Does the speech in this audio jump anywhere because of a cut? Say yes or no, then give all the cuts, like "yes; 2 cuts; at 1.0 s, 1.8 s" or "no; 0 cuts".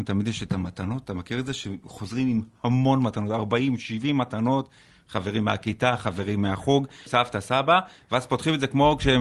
yes; 1 cut; at 7.1 s